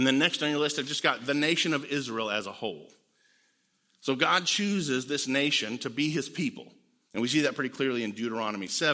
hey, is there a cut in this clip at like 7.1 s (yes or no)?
yes